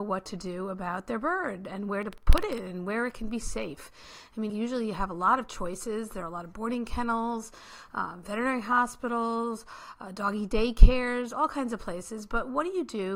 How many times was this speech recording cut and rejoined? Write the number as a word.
one